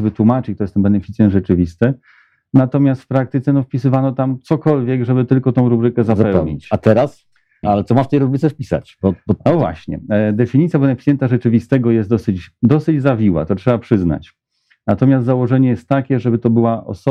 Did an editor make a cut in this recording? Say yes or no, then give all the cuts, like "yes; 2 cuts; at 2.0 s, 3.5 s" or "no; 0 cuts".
yes; 1 cut; at 7.6 s